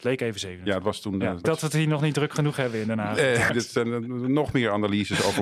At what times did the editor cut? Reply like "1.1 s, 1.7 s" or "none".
1.4 s, 3.5 s

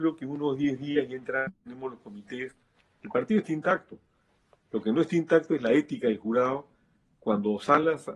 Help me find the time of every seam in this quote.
none

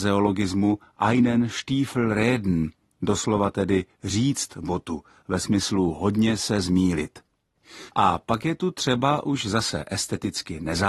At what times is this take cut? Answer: 7.9 s

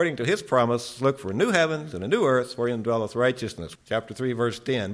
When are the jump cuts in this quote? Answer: 3.8 s

